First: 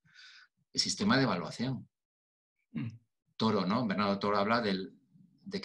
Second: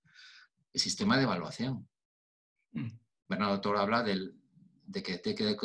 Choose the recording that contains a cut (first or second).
second